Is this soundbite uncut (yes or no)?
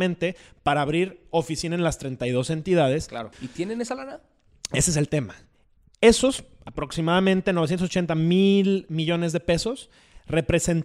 no